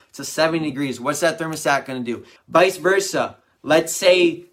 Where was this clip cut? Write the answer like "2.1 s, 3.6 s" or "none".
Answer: 2.4 s

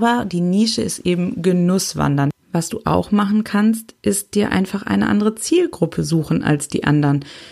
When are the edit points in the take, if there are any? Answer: none

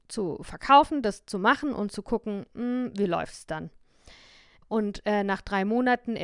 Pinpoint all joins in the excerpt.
4.6 s

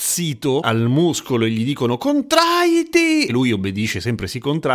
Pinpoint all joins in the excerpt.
none

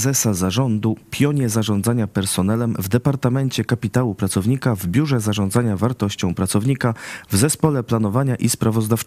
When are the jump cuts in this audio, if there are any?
none

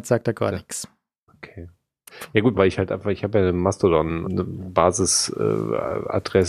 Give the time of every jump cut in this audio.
2.5 s, 4.2 s

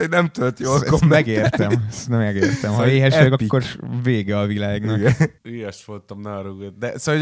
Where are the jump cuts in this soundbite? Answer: 5.4 s

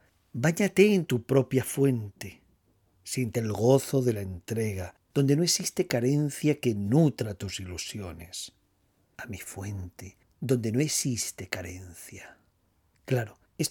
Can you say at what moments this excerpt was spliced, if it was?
9.1 s, 10.2 s

